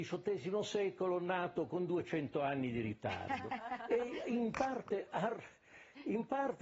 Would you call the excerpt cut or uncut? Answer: uncut